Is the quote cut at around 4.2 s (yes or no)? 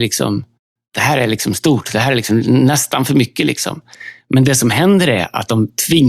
no